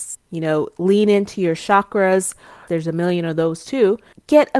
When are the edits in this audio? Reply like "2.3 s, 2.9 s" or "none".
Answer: 2.7 s